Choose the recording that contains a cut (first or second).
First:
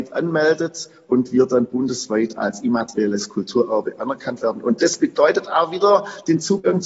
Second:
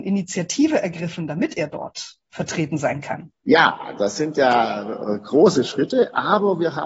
second